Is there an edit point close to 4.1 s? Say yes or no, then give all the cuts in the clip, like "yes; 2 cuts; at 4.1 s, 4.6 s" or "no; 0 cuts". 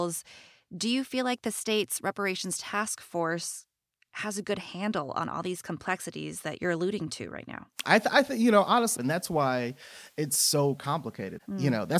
no; 2 cuts; at 7.8 s, 9.0 s